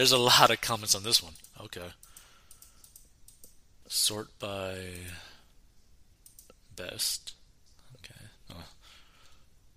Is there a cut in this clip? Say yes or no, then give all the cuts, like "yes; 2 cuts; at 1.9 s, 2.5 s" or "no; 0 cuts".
yes; 1 cut; at 3.8 s